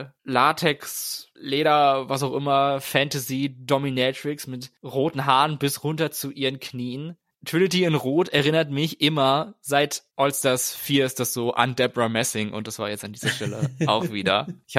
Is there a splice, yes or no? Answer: no